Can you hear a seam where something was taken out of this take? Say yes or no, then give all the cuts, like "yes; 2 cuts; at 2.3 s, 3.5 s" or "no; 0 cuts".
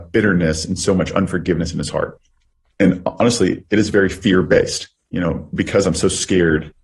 yes; 1 cut; at 2.7 s